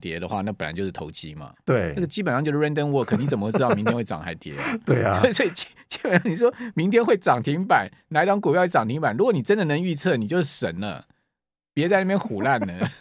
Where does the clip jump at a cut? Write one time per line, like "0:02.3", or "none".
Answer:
none